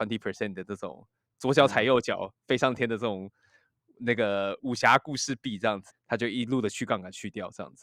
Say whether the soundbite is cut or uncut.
cut